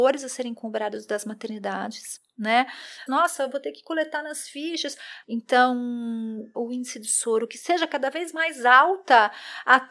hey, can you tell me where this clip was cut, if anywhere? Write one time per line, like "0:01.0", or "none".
0:03.1
0:05.2
0:06.5